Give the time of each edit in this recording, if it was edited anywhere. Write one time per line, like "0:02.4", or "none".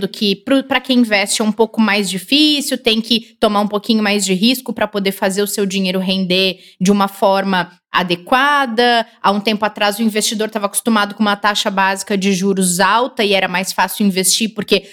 none